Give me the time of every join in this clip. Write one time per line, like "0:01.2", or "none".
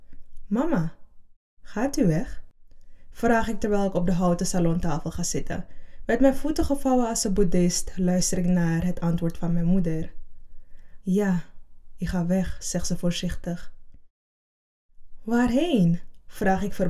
0:11.0

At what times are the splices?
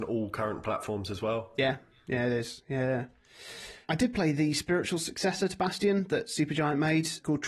none

